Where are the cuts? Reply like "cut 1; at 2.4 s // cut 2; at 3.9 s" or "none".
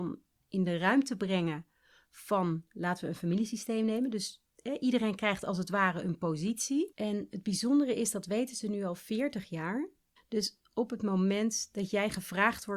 cut 1; at 6.9 s // cut 2; at 10.2 s

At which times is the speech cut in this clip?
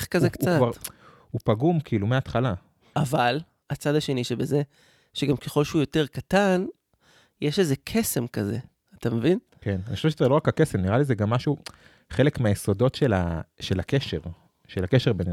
cut 1; at 2.9 s

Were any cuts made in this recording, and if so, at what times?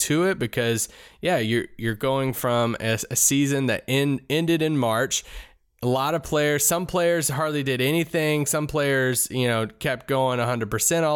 none

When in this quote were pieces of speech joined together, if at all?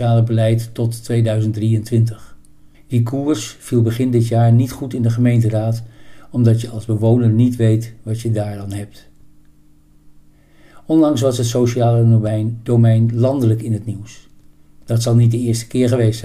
cut 1; at 2.7 s

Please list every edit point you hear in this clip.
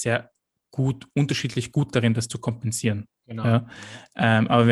none

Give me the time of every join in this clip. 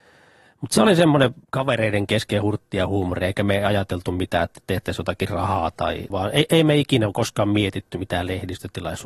cut 1; at 1.4 s // cut 2; at 6.1 s

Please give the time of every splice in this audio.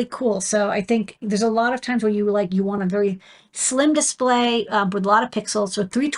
none

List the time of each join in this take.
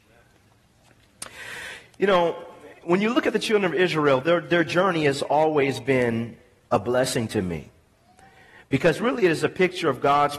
none

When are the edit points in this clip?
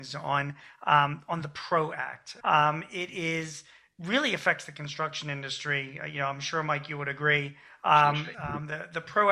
cut 1; at 2.4 s // cut 2; at 8.3 s

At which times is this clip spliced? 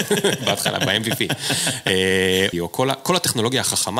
cut 1; at 2.5 s

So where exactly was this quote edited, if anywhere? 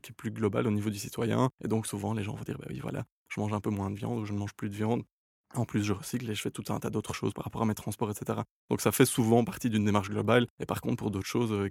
cut 1; at 10.5 s

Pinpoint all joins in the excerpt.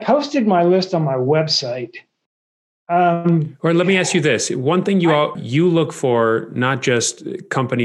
cut 1; at 5.3 s

